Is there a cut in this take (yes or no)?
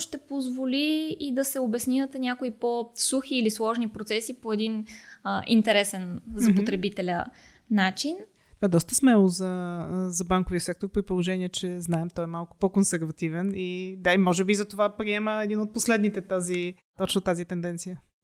no